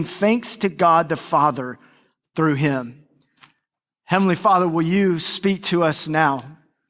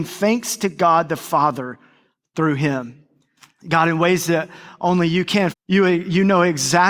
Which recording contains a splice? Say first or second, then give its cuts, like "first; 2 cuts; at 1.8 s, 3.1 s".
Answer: second; 2 cuts; at 3.6 s, 5.5 s